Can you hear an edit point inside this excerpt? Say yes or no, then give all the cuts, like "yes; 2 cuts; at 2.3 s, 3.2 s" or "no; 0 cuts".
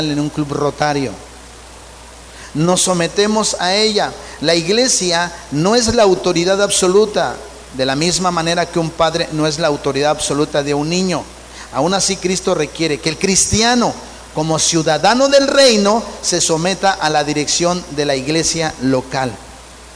no; 0 cuts